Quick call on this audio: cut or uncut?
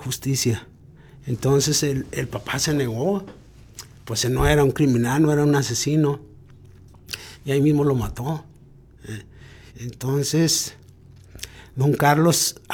cut